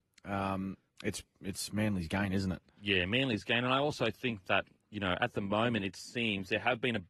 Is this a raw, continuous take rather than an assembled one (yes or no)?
yes